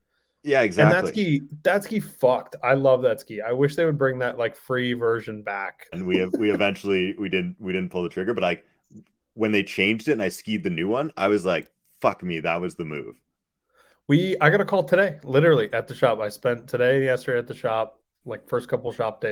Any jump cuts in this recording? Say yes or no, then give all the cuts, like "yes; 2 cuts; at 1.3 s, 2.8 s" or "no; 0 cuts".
yes; 1 cut; at 5.9 s